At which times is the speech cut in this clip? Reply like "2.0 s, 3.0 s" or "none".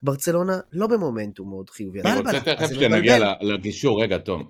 2.0 s